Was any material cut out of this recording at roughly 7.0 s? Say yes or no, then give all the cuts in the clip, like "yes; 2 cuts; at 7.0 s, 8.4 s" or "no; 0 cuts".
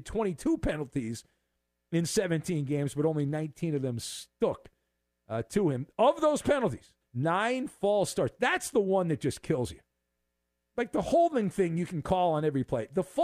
yes; 1 cut; at 7.0 s